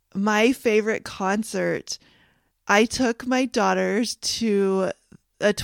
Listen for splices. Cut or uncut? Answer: cut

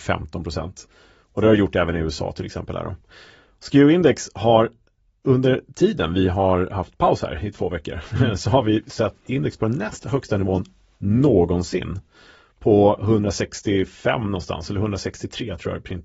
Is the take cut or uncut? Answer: uncut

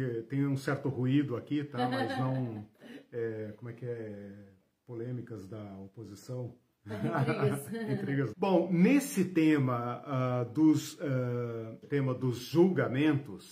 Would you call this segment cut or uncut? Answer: cut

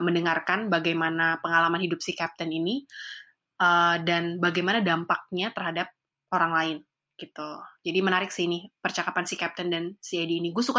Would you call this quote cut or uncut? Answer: uncut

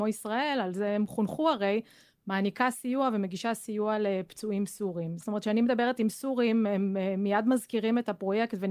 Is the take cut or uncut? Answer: cut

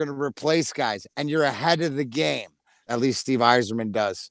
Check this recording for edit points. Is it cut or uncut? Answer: cut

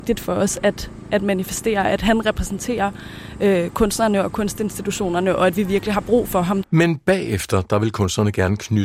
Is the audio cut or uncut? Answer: cut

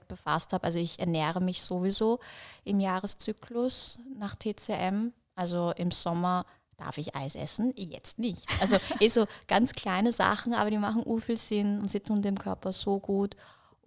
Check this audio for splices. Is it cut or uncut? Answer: uncut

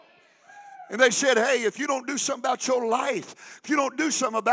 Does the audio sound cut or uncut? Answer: uncut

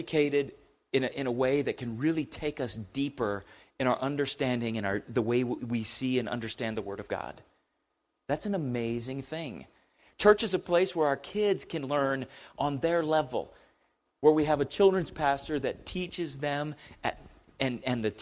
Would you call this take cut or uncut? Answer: uncut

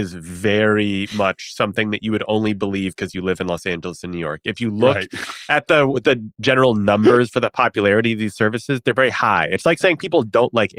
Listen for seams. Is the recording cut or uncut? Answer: uncut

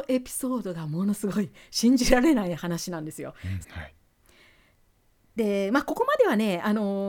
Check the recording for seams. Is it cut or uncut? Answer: cut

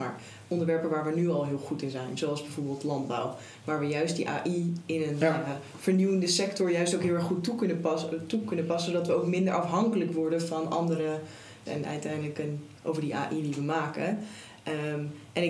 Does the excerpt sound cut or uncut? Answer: cut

